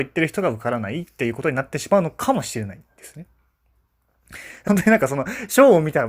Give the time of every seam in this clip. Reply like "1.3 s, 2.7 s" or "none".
4.7 s